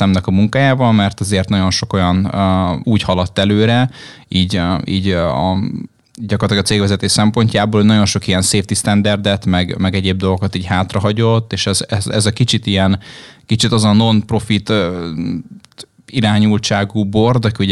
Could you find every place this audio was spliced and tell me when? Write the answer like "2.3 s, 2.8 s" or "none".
2.8 s